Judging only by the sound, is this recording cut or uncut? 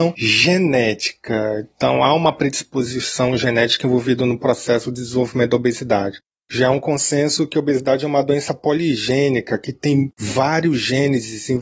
uncut